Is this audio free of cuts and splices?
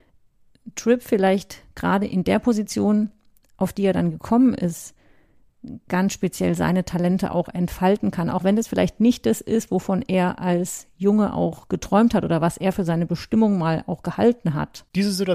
yes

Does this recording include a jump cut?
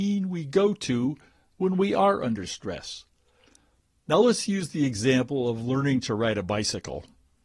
no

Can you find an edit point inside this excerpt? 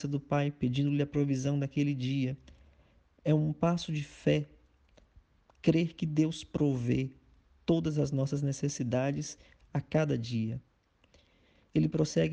no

